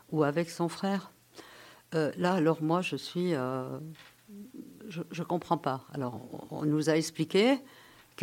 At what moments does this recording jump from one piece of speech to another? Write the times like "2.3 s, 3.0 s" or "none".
none